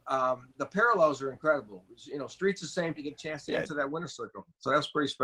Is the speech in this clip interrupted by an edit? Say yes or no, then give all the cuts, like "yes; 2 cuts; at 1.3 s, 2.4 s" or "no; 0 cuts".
yes; 1 cut; at 3.0 s